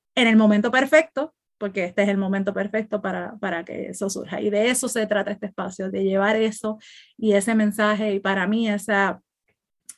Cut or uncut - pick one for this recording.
cut